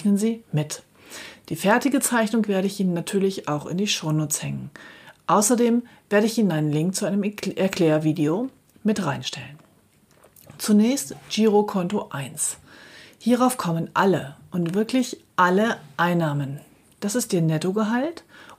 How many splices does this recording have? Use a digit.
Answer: 0